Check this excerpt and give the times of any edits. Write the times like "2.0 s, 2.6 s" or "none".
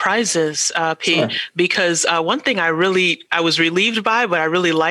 none

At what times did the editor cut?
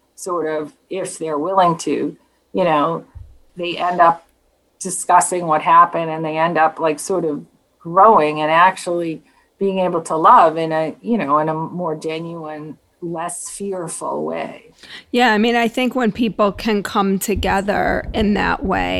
3.5 s

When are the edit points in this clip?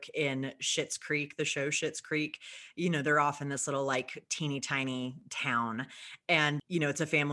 none

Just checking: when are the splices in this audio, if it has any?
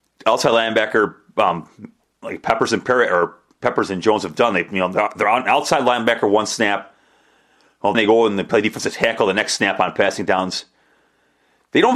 7.9 s

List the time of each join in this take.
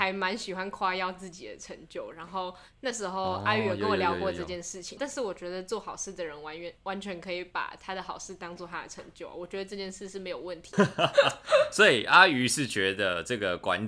5.0 s, 10.7 s

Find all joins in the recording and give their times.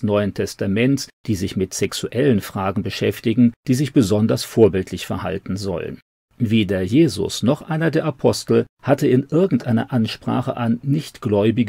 3.6 s, 6.2 s

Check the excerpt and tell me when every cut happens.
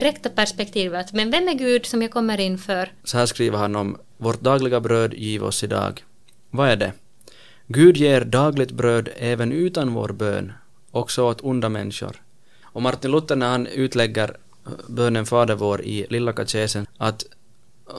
3.0 s, 12.6 s, 16.8 s

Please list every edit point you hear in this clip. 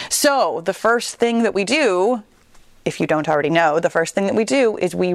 none

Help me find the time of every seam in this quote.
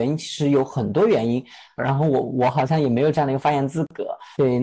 1.8 s

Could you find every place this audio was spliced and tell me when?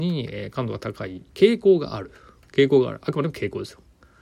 1.3 s

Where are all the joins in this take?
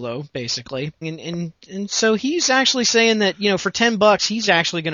1.0 s

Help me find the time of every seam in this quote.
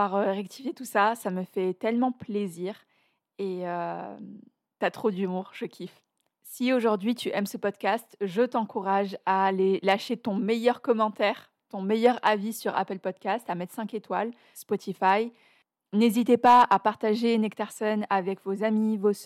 14.5 s

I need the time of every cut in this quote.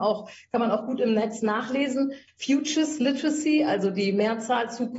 2.3 s

